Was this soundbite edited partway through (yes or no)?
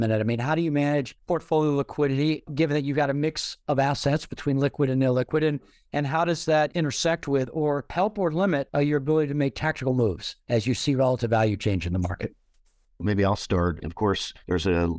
yes